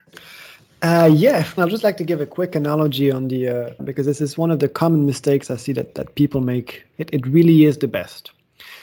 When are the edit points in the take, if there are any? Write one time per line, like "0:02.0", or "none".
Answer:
0:01.6
0:03.8
0:06.9